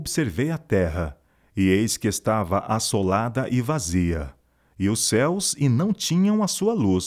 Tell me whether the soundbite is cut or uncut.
uncut